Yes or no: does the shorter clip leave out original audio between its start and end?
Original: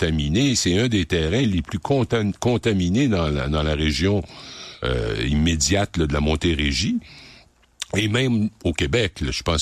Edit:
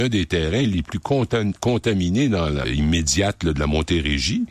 yes